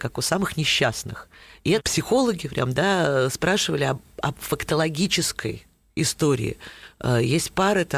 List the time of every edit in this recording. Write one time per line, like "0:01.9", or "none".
0:01.8